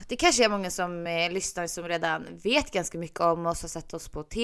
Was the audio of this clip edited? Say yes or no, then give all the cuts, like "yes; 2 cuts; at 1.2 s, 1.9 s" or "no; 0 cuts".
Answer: no; 0 cuts